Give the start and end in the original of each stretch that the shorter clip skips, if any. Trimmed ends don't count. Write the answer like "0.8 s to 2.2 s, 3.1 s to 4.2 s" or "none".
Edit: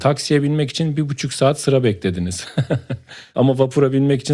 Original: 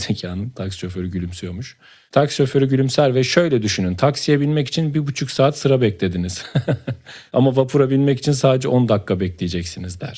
none